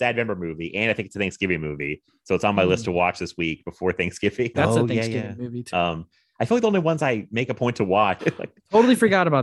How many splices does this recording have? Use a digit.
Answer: 3